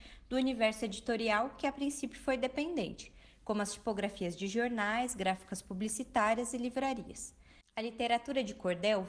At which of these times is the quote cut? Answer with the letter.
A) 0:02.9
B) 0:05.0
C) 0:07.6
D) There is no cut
C